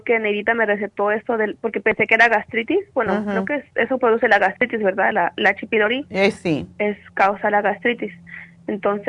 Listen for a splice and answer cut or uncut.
uncut